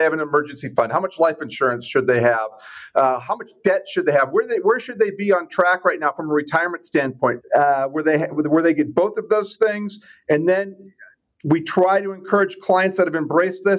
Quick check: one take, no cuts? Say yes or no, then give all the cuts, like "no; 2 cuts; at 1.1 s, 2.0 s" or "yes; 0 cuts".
no; 1 cut; at 7.4 s